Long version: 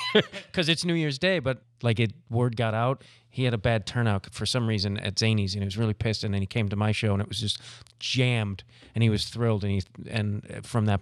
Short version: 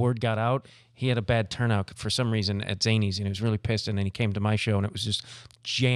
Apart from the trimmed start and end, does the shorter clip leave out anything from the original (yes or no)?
no